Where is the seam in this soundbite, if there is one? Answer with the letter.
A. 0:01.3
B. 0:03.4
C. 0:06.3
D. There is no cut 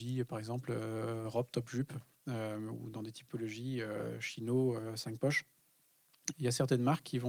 C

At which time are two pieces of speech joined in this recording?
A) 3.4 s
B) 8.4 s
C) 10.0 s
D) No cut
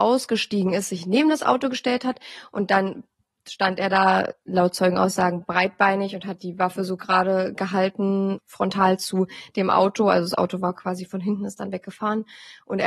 B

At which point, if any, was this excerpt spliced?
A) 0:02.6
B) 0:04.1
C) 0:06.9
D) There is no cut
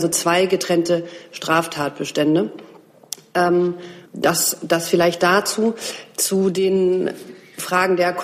B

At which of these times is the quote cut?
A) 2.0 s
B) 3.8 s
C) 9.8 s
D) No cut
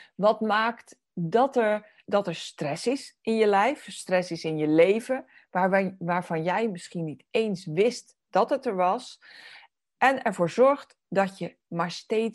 A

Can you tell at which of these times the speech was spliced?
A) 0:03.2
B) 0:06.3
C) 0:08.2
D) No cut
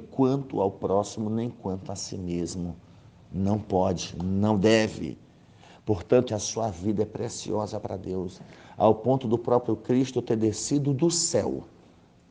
B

